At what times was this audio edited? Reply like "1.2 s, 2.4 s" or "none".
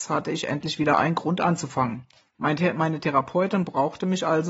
2.3 s